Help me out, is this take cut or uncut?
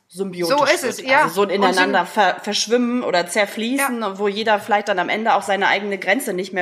uncut